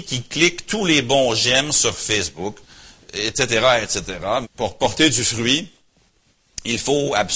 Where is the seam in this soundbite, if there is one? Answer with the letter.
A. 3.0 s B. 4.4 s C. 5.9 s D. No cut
B